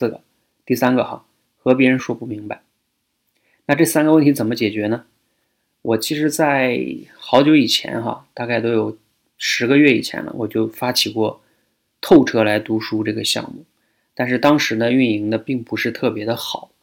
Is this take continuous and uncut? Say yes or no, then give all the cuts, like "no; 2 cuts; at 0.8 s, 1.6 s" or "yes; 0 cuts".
no; 1 cut; at 2.0 s